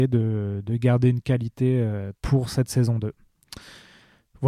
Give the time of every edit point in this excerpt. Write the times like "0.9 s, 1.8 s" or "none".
2.2 s

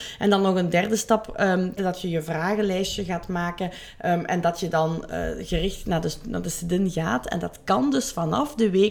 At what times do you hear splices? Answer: 1.8 s

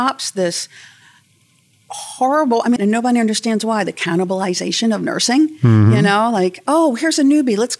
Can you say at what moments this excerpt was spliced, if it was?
2.8 s

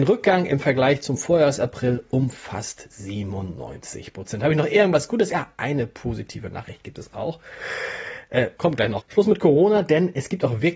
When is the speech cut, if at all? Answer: 9.0 s

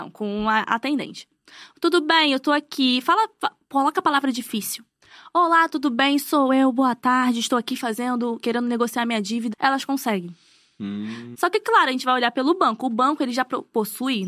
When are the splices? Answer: 9.5 s, 11.3 s

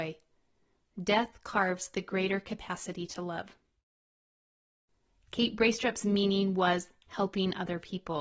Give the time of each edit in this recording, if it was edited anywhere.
none

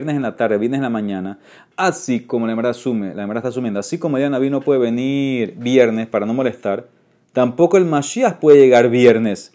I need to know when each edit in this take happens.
none

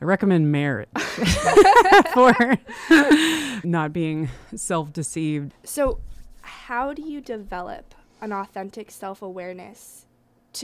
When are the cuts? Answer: 3.6 s, 5.5 s

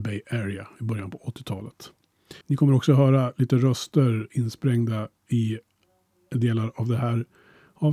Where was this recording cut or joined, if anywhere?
2.4 s

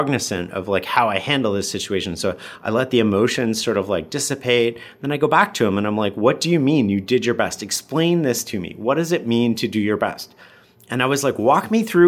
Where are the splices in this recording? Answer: none

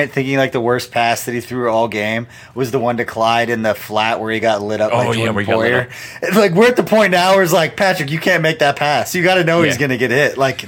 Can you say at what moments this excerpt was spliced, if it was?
none

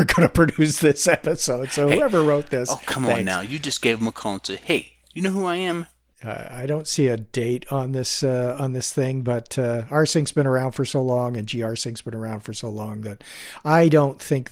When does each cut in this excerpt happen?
6.1 s

